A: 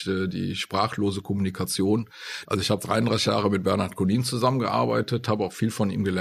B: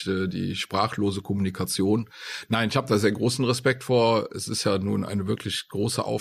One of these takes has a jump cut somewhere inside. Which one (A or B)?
A